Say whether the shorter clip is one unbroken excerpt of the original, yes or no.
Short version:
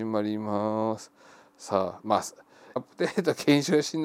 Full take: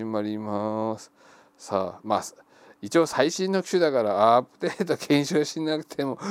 no